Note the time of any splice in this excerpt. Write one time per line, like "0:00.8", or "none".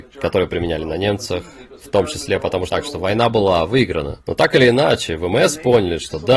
0:02.7
0:04.2